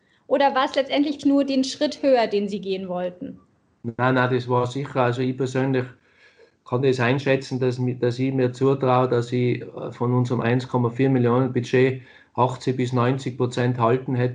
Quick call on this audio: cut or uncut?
cut